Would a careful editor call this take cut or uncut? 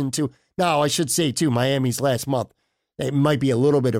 uncut